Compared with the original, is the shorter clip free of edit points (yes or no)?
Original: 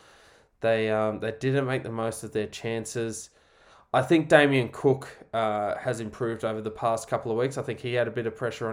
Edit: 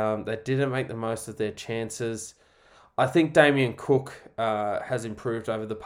yes